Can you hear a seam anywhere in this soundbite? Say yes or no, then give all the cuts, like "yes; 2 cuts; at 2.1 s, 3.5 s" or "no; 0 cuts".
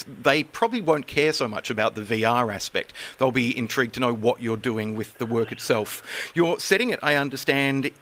no; 0 cuts